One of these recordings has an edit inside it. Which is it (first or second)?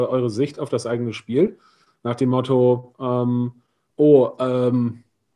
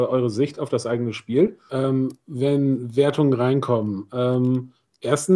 second